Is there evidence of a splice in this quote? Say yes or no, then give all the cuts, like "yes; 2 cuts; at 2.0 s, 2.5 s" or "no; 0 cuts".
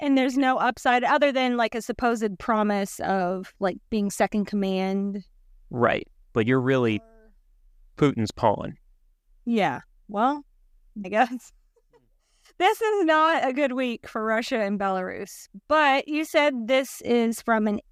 yes; 1 cut; at 11.0 s